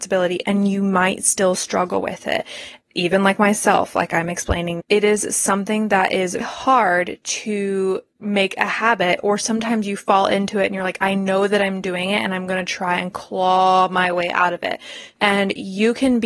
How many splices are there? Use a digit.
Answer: 3